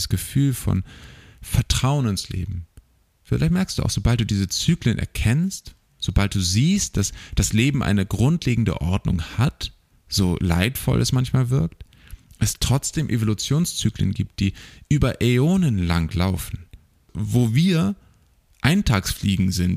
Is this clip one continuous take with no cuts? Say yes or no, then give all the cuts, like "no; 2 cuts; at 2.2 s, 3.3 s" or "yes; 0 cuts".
no; 1 cut; at 9.9 s